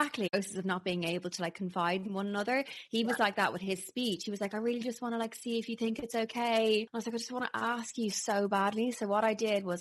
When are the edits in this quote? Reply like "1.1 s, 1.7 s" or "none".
6.9 s